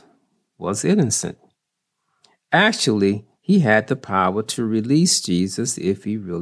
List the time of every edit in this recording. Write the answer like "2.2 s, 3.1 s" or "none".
none